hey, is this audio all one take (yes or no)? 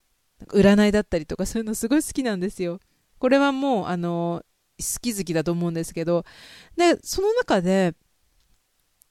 yes